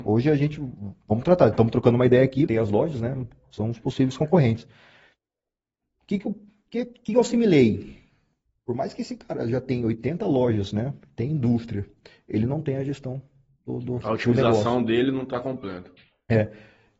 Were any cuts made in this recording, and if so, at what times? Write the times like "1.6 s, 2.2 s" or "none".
2.5 s

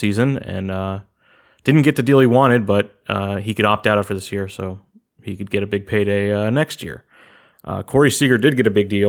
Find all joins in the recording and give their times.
none

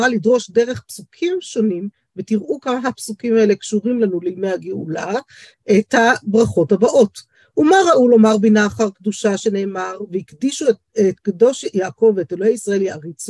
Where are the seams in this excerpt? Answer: none

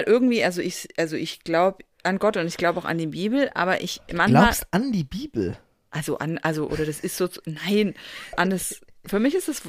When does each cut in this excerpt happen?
8.3 s

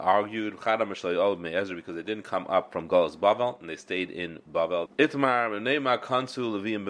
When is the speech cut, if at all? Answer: 4.9 s

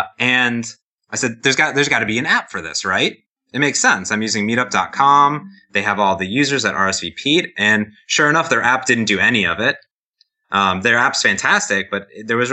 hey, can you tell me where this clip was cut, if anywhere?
none

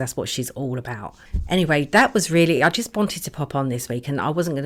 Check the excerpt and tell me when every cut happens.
none

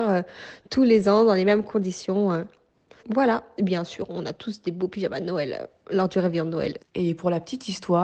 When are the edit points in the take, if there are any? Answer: 3.0 s, 6.8 s

